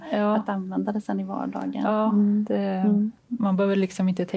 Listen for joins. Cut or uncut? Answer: cut